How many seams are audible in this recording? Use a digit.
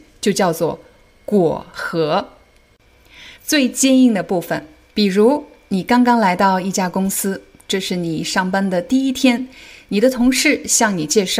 2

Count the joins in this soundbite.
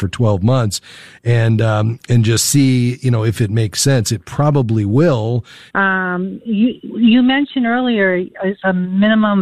1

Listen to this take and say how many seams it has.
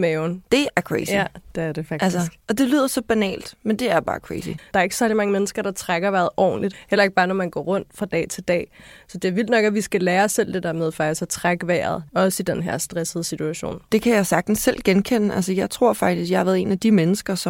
2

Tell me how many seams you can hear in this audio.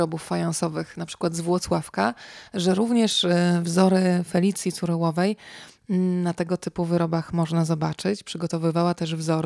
0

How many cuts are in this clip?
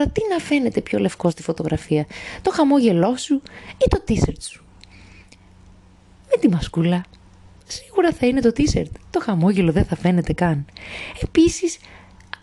0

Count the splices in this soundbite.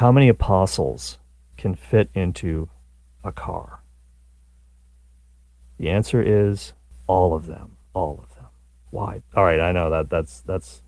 2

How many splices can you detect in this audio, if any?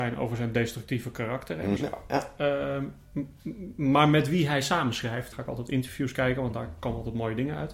2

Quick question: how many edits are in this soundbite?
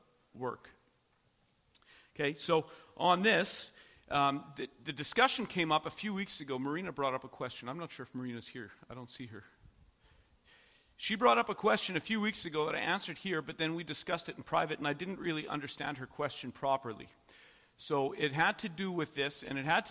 0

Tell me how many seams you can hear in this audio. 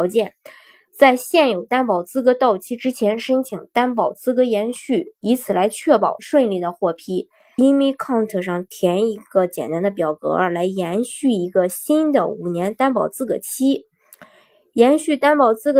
1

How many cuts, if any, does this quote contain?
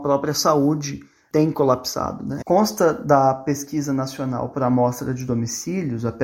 1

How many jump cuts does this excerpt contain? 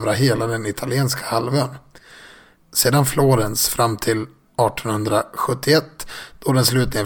1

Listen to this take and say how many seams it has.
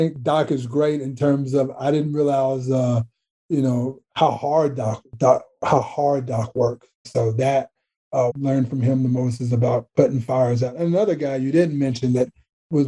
2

